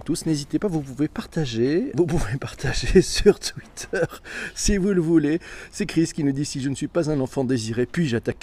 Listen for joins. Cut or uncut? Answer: cut